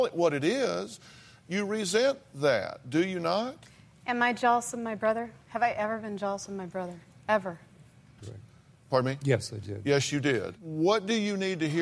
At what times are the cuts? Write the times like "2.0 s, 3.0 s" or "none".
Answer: 8.2 s